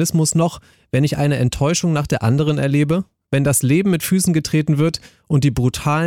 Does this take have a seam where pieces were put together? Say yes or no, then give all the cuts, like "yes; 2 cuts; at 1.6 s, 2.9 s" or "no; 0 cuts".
no; 0 cuts